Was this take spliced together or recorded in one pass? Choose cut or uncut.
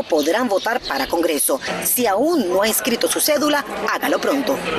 uncut